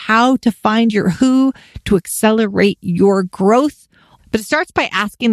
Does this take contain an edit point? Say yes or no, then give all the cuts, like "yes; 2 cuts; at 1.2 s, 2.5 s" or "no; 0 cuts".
yes; 1 cut; at 4.2 s